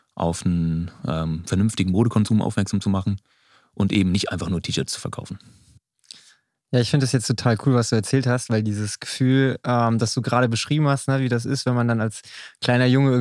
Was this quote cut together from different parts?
no; 0 cuts

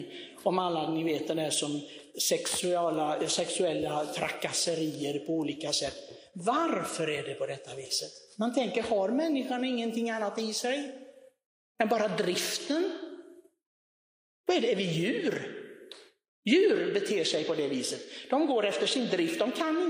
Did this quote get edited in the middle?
no; 0 cuts

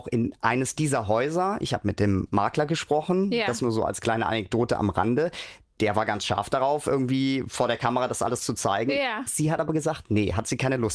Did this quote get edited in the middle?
no; 0 cuts

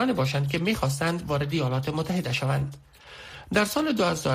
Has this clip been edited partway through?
yes; 1 cut; at 3.4 s

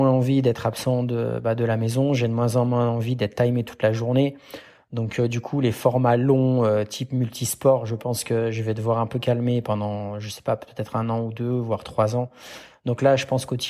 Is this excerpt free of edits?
yes; 0 cuts

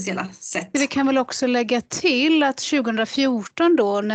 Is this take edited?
no; 0 cuts

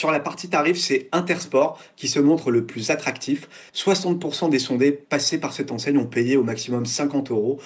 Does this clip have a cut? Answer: no; 0 cuts

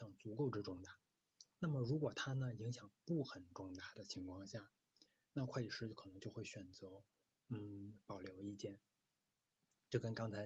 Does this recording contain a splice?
no; 0 cuts

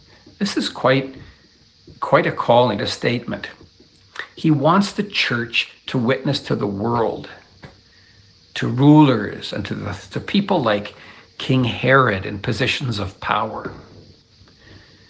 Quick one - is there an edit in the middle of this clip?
yes; 2 cuts; at 2.8 s, 10.1 s

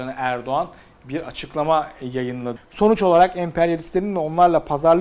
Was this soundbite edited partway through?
yes; 1 cut; at 2.6 s

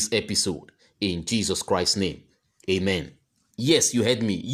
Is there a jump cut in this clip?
yes; 1 cut; at 3.5 s

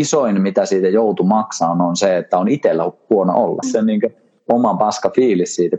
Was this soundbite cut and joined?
yes; 1 cut; at 3.6 s

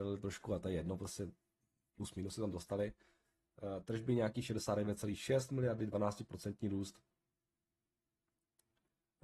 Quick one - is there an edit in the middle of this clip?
no; 0 cuts

